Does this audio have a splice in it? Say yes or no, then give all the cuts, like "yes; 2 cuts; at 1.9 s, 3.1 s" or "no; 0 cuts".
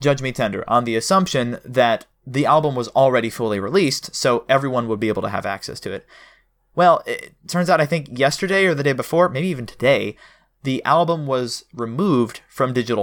no; 0 cuts